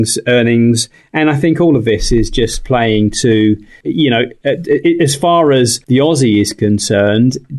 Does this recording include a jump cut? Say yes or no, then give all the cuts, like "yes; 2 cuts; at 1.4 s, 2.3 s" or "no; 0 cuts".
yes; 2 cuts; at 3.8 s, 5.8 s